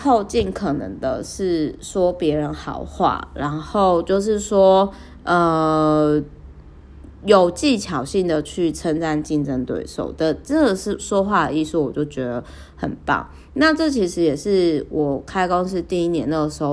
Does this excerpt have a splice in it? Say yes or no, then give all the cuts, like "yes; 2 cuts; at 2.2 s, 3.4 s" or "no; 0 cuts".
no; 0 cuts